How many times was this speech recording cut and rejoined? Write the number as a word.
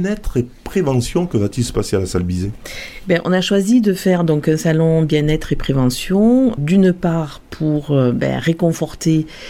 one